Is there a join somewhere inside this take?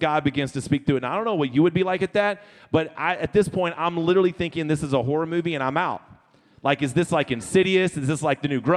no; 0 cuts

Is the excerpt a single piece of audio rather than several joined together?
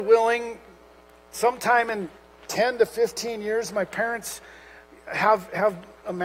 yes; 0 cuts

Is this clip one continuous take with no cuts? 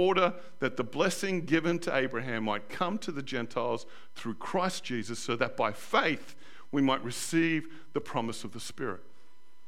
yes; 0 cuts

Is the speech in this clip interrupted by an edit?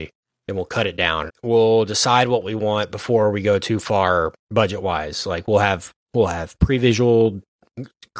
yes; 1 cut; at 1.3 s

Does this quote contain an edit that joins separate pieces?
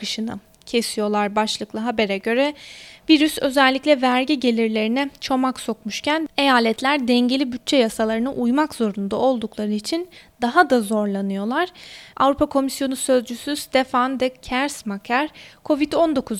yes; 1 cut; at 12.1 s

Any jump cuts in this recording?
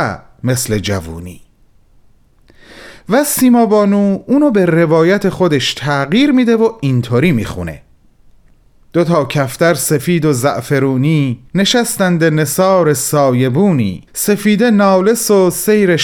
yes; 2 cuts; at 11.5 s, 14.1 s

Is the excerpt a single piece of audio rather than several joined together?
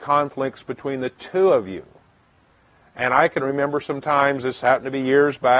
yes; 0 cuts

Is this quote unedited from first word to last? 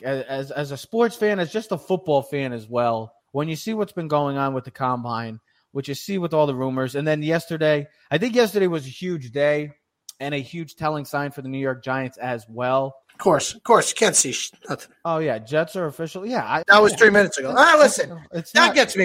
no; 3 cuts; at 3.2 s, 13.0 s, 16.6 s

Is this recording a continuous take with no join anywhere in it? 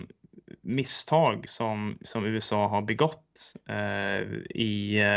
yes; 0 cuts

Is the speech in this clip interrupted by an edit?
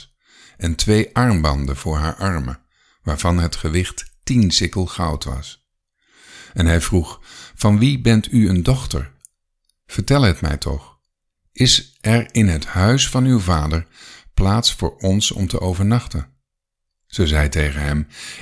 no; 0 cuts

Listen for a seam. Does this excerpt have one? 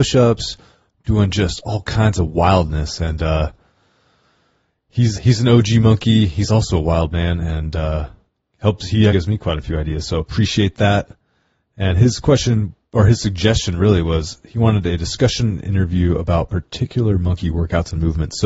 yes; 2 cuts; at 5.1 s, 9.1 s

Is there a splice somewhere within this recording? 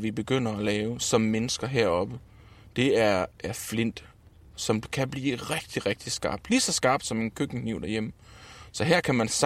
no; 0 cuts

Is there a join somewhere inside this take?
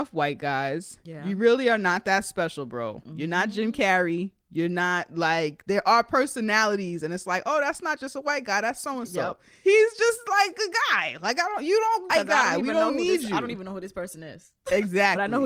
yes; 1 cut; at 12.1 s

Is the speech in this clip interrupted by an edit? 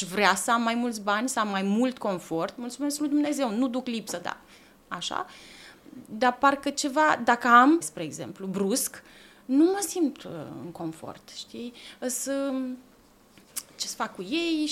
yes; 1 cut; at 7.8 s

